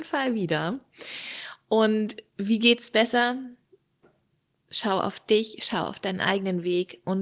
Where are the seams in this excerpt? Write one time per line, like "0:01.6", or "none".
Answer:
none

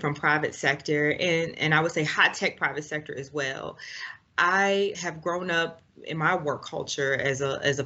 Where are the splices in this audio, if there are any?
0:04.9

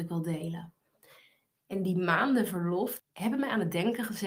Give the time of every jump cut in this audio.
0:03.0

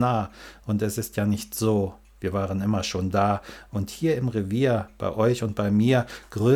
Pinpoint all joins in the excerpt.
none

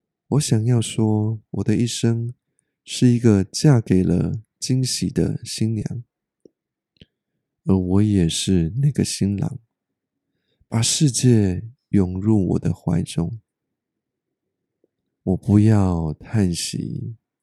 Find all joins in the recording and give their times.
0:15.1

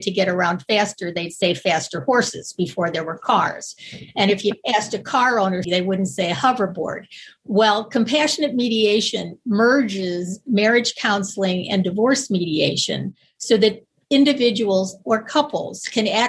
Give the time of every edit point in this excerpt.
0:05.6

